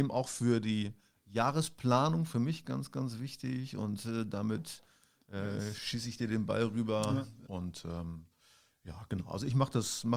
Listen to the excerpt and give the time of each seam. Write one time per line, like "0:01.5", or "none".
0:07.5